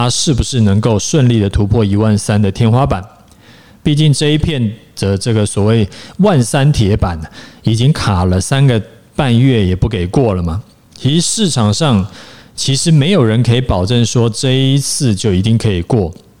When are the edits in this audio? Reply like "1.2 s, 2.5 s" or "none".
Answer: none